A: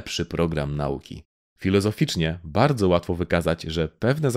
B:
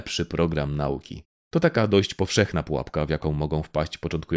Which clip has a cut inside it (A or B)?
A